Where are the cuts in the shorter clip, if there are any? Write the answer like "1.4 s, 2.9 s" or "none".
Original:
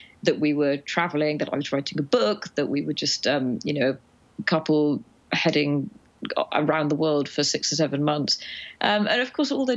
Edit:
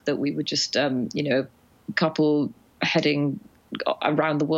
none